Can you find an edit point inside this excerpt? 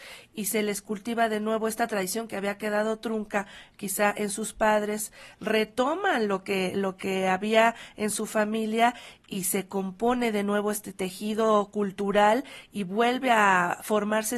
no; 0 cuts

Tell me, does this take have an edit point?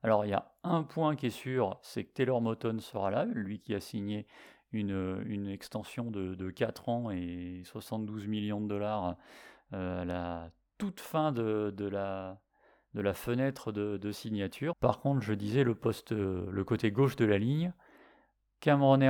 yes; 1 cut; at 14.7 s

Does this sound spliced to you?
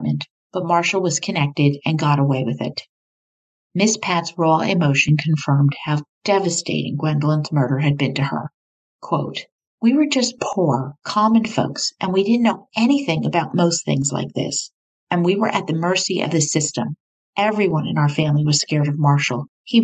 no; 0 cuts

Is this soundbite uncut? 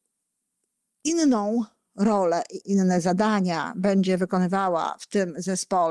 no; 1 cut; at 2.6 s

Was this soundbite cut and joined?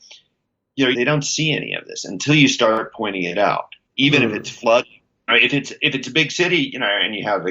yes; 3 cuts; at 0.9 s, 3.9 s, 5.3 s

